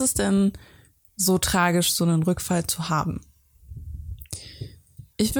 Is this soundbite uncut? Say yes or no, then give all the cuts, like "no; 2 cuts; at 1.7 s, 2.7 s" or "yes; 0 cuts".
yes; 0 cuts